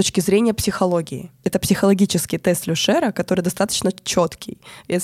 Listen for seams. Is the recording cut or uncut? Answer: cut